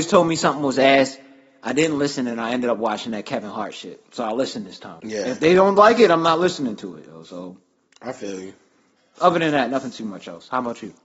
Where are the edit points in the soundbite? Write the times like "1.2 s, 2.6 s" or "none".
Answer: 5.0 s